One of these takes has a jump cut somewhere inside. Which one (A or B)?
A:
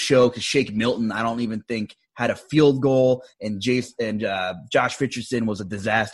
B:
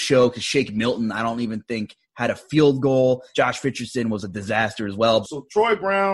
B